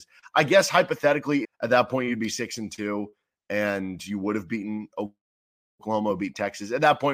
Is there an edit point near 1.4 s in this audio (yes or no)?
yes